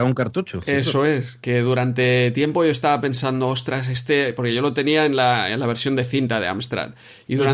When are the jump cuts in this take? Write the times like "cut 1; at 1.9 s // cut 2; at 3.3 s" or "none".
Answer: none